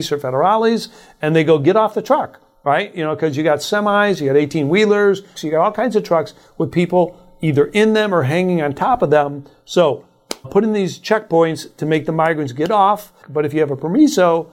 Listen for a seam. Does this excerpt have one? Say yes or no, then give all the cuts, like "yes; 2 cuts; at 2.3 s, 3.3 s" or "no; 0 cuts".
yes; 3 cuts; at 5.4 s, 10.4 s, 13.2 s